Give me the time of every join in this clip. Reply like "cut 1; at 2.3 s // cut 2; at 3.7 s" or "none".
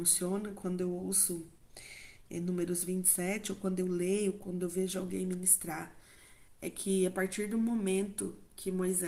none